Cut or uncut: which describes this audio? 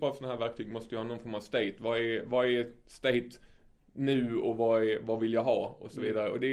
uncut